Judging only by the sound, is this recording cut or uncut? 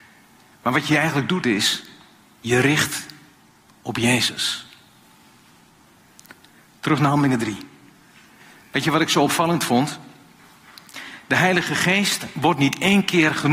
uncut